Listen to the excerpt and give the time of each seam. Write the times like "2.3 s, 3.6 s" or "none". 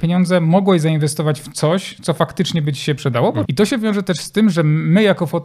3.5 s

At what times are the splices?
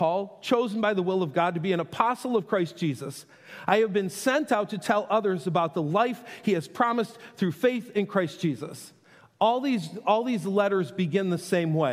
none

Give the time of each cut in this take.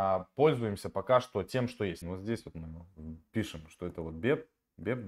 2.0 s

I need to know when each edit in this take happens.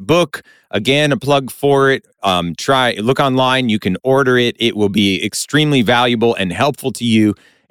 none

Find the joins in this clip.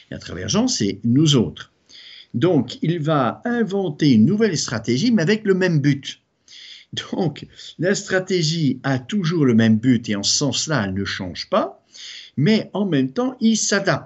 none

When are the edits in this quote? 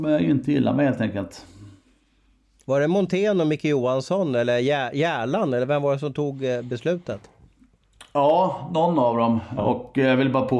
9.6 s

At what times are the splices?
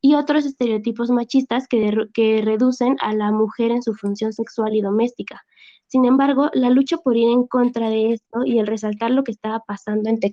none

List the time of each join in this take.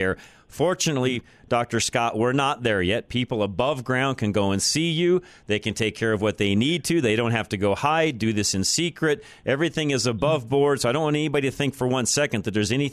none

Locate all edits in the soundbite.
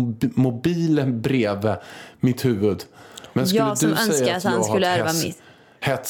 3.3 s

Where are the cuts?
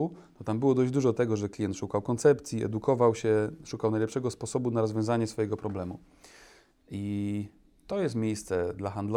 none

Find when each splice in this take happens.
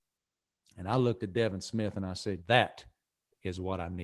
2.4 s

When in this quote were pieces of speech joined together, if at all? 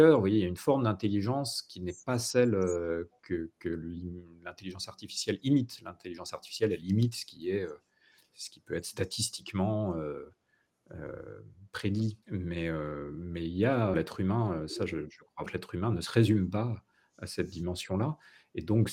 12.2 s, 13.9 s, 15.5 s

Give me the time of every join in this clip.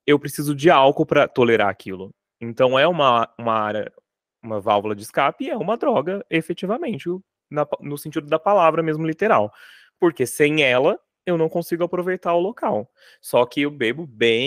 7.4 s

